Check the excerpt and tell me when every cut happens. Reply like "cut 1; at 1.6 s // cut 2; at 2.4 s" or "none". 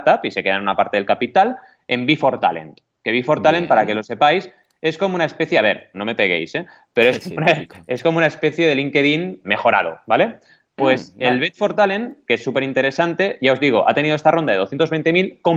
cut 1; at 5.9 s // cut 2; at 9.4 s